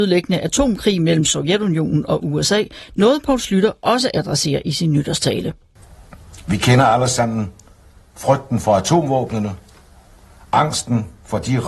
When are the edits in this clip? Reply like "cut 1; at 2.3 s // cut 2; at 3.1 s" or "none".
none